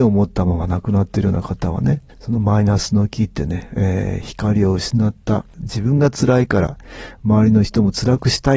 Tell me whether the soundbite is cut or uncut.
uncut